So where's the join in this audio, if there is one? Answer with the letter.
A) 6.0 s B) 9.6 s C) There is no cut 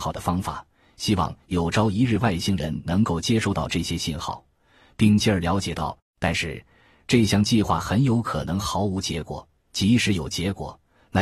A